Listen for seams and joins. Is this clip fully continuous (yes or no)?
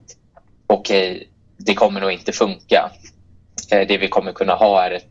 yes